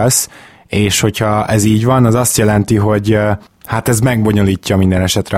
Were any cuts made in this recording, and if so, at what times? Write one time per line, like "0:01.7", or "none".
none